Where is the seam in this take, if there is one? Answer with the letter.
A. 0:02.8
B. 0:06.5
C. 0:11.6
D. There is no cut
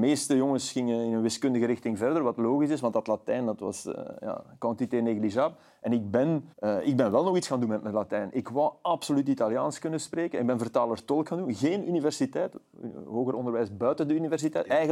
B